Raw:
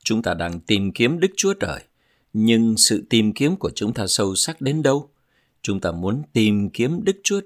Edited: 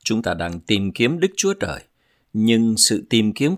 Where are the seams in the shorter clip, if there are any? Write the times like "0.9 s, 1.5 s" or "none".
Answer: none